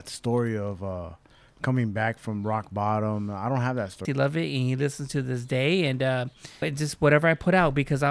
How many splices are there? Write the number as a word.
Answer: two